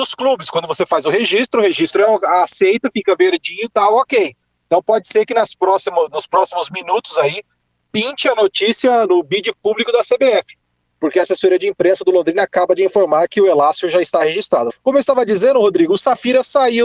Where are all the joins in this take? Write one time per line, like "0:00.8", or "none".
0:09.1
0:14.7